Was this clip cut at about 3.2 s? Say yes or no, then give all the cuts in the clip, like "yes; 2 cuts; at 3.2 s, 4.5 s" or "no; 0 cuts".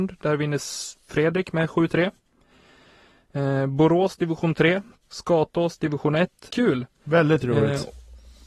no; 2 cuts; at 5.0 s, 6.5 s